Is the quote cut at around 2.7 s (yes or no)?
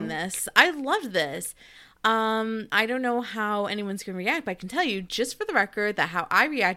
yes